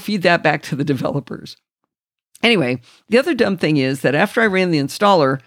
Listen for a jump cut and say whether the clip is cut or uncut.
uncut